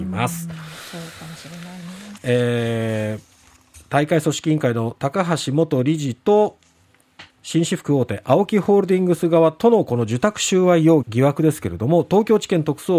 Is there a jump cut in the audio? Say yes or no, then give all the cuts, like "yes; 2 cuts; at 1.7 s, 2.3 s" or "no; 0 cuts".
yes; 3 cuts; at 2.2 s, 7.3 s, 11.0 s